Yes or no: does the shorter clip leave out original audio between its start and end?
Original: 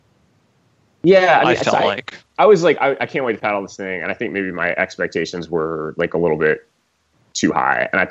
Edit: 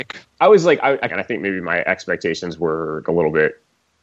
yes